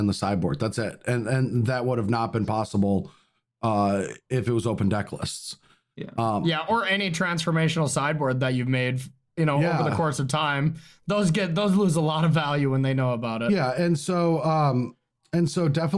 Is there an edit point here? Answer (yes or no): no